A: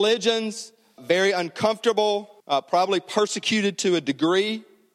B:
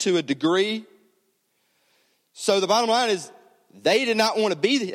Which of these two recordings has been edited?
A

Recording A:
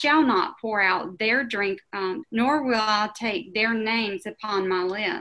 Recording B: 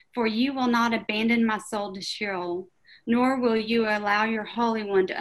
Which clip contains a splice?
A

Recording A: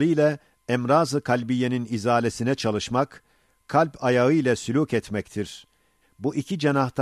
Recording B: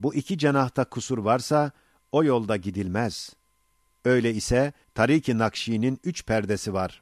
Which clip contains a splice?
A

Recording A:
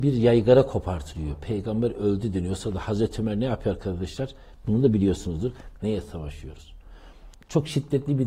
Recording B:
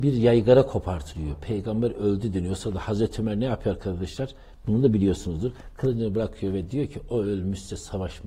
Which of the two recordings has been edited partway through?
A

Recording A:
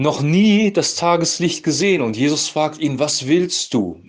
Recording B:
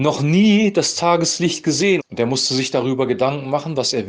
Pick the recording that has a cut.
B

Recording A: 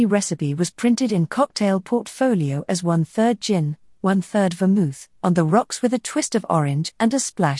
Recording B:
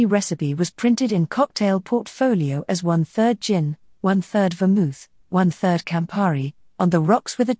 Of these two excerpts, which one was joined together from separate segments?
A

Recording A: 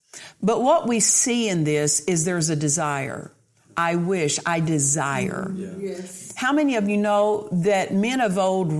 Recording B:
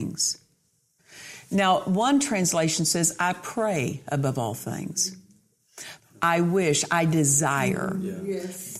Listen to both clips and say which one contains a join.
B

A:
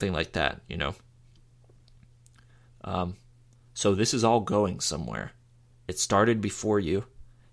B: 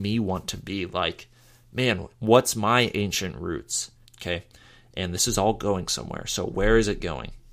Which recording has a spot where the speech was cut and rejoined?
B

